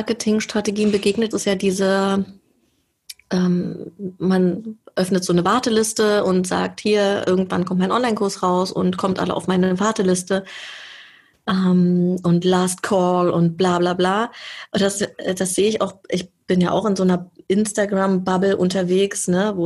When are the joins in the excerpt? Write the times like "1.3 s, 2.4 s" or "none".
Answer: 1.3 s